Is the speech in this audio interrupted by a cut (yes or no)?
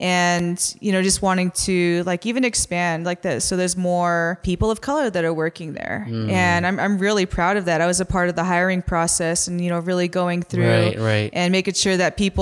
no